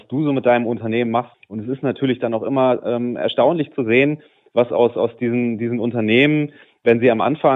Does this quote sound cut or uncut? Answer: cut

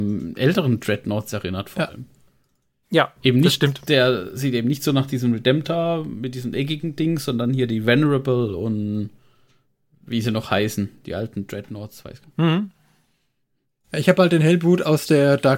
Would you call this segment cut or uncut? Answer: uncut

